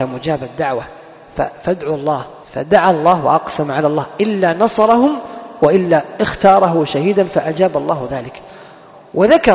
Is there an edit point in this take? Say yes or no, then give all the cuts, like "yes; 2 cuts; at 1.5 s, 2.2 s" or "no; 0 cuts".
yes; 1 cut; at 2.4 s